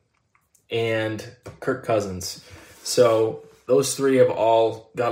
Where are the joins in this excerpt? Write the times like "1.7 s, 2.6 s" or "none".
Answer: none

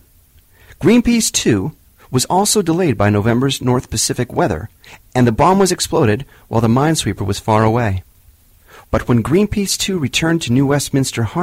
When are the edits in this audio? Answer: none

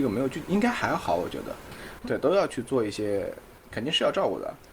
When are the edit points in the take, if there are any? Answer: 2.0 s

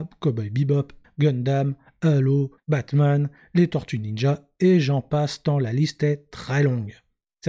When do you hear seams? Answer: 1.0 s, 2.6 s

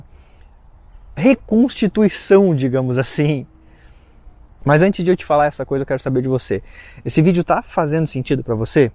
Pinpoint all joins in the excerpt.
4.6 s

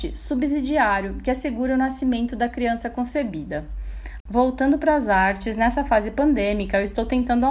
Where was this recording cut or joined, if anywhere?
4.2 s

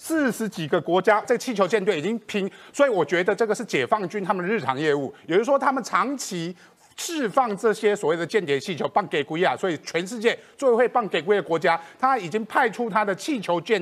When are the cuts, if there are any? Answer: 1.2 s

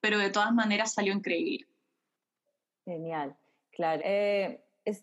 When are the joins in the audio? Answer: 4.0 s

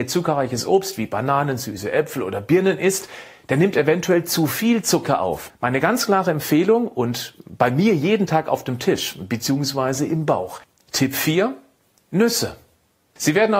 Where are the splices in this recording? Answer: 5.5 s

